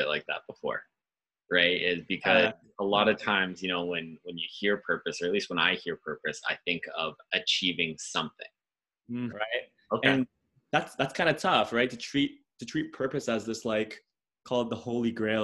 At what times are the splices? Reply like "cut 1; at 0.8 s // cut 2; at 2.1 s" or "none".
cut 1; at 9.3 s